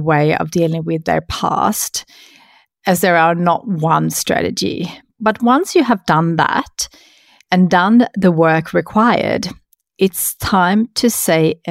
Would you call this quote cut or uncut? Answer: uncut